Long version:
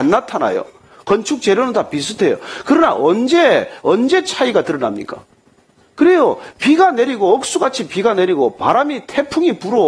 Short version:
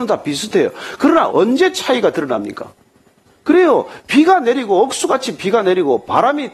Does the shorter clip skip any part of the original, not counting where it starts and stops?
yes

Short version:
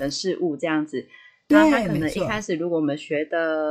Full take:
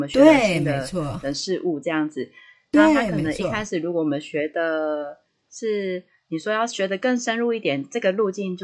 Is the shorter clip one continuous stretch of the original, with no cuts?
yes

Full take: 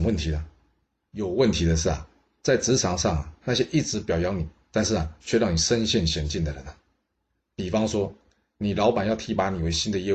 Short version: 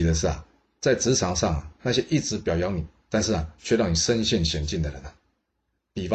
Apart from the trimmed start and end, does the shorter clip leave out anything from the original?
no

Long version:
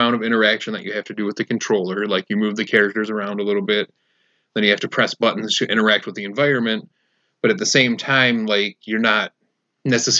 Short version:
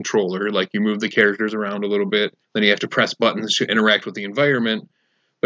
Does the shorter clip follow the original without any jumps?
no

